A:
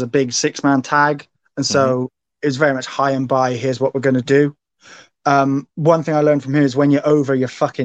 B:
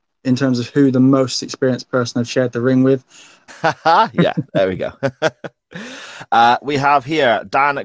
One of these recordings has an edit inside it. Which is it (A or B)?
B